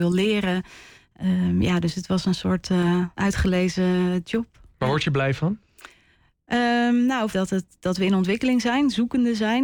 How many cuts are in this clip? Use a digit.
2